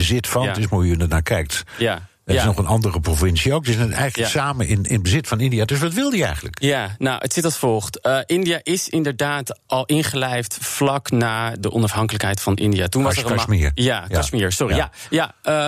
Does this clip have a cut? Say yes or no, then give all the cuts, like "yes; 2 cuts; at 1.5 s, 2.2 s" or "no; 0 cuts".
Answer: no; 0 cuts